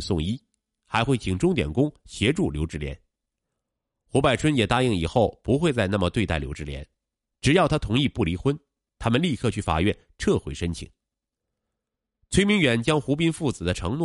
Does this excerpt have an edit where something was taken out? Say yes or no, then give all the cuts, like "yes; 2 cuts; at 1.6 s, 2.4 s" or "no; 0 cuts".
no; 0 cuts